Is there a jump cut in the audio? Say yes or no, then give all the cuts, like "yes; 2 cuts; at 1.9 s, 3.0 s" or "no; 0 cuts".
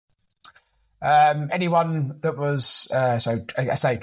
yes; 1 cut; at 1.5 s